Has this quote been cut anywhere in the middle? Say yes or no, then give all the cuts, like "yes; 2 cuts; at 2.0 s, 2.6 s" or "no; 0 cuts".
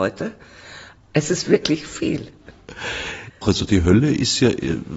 yes; 2 cuts; at 1.0 s, 3.4 s